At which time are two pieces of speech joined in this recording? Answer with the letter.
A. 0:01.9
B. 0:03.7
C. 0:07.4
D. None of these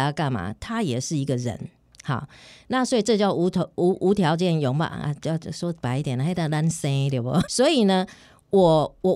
C